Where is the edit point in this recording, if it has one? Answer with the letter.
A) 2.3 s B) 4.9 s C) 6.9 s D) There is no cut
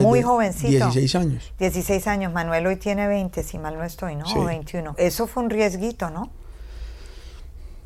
B